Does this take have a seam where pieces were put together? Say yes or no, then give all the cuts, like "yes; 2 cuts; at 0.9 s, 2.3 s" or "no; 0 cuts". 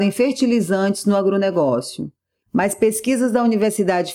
yes; 1 cut; at 2.4 s